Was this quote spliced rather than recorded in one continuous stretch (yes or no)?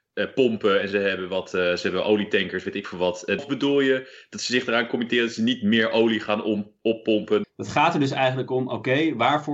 yes